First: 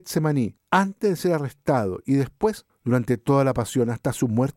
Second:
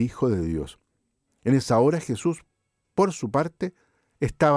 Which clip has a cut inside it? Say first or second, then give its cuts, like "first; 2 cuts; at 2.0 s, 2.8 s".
second; 1 cut; at 1.3 s